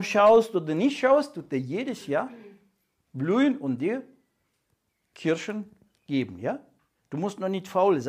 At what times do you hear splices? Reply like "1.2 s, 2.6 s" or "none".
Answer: none

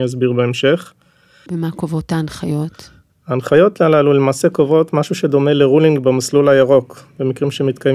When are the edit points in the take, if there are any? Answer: 1.5 s

